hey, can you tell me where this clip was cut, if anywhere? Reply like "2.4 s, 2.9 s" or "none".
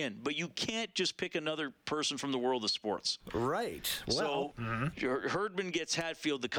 4.5 s

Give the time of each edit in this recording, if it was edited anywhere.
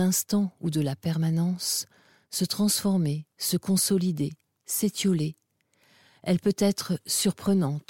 none

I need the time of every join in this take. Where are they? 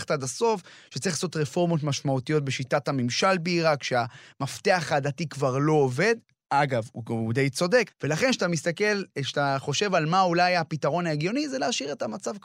7.9 s

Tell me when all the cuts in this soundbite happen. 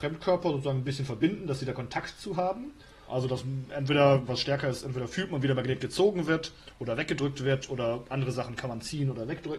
3.1 s, 4.3 s

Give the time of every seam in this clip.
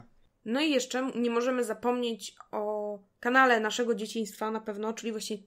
none

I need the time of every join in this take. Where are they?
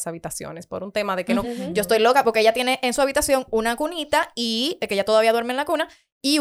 1.4 s

